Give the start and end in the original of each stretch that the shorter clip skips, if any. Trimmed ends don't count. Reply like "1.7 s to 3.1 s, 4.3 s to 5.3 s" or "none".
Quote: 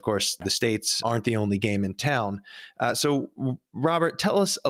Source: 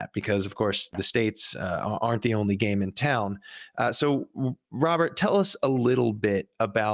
1.5 s to 2.0 s